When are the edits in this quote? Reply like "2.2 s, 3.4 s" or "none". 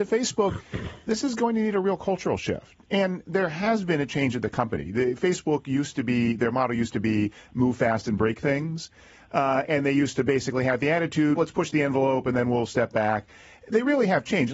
11.4 s